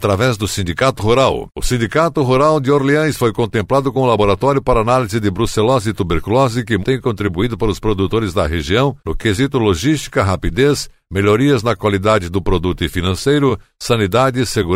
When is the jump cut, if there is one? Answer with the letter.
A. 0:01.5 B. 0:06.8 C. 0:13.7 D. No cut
B